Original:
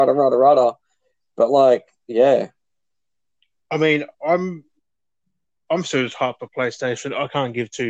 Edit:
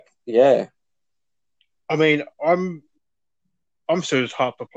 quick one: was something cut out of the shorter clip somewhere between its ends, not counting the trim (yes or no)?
no